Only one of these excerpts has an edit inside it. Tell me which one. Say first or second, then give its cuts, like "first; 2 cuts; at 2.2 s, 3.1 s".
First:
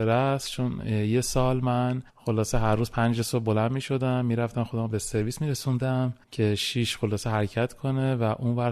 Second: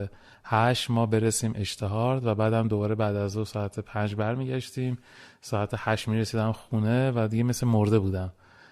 first; 2 cuts; at 2.1 s, 6.2 s